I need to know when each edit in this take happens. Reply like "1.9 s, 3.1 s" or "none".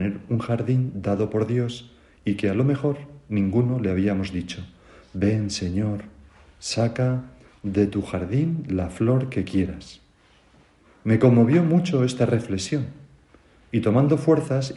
none

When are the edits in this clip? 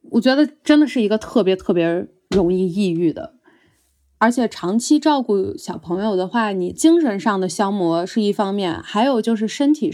none

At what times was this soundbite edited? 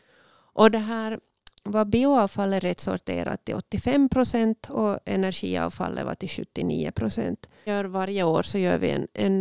1.5 s, 7.7 s

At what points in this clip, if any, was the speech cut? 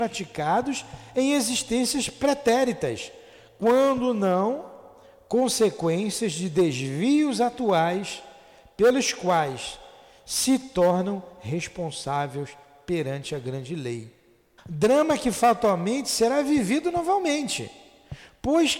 14.6 s

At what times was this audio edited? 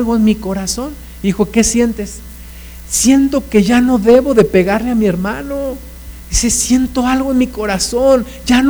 none

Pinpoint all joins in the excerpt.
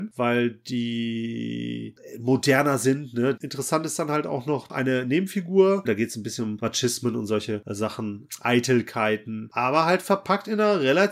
3.4 s, 5.8 s

